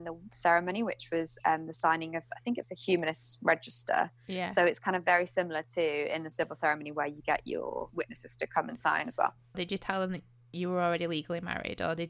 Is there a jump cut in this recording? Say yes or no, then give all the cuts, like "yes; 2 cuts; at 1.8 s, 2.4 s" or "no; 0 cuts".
yes; 1 cut; at 9.5 s